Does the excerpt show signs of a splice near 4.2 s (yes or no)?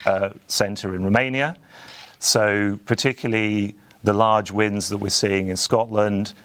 no